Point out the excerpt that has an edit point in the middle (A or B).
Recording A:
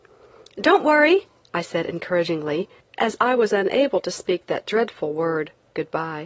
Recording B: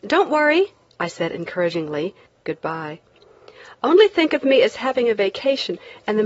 B